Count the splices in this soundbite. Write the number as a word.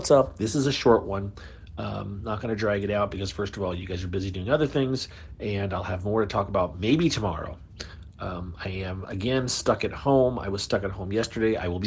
zero